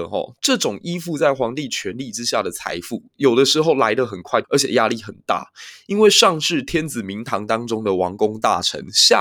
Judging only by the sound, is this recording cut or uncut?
cut